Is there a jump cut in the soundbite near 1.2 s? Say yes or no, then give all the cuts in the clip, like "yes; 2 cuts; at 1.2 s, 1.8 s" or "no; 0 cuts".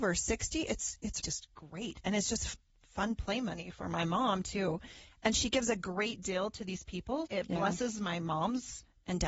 yes; 2 cuts; at 1.2 s, 7.3 s